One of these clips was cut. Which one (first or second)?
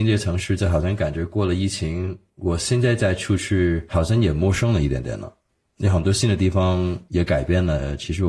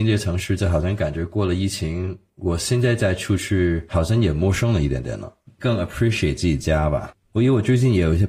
second